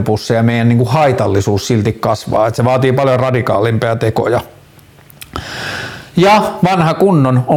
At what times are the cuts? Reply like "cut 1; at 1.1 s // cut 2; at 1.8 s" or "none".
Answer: none